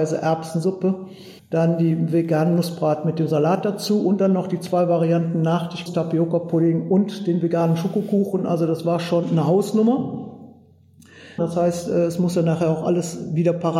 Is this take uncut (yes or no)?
no